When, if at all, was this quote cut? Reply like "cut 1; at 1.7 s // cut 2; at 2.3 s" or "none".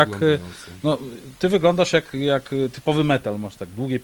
cut 1; at 2.1 s